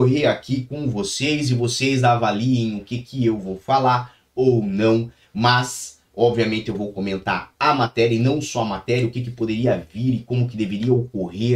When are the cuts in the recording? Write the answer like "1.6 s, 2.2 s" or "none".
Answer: none